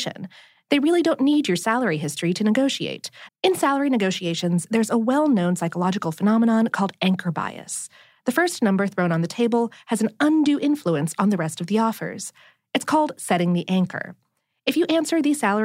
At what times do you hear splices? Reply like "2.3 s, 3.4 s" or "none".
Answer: 3.3 s